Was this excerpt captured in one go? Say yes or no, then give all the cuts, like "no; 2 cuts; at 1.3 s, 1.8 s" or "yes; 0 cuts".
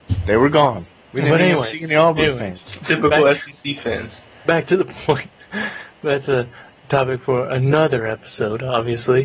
yes; 0 cuts